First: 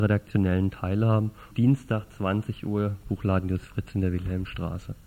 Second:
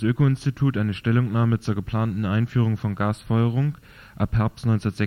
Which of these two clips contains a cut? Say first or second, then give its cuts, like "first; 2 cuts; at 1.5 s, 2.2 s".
first; 1 cut; at 1.5 s